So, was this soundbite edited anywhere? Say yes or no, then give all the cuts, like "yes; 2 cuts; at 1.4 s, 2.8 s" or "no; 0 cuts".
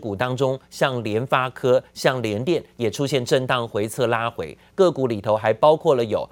no; 0 cuts